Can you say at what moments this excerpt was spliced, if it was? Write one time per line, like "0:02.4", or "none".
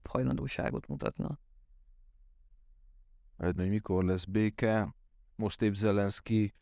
0:03.6
0:05.3